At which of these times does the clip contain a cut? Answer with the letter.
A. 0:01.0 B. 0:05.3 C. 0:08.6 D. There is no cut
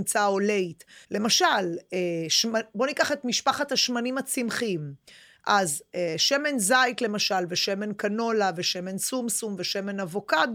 A